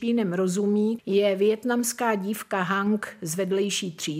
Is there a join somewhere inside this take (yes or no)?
yes